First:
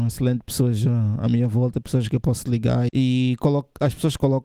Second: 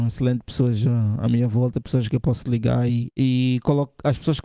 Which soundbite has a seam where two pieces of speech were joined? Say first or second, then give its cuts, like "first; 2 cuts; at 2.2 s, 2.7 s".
first; 1 cut; at 2.9 s